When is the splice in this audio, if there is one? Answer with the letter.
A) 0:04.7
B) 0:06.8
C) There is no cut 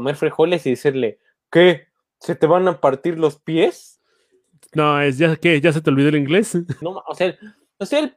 B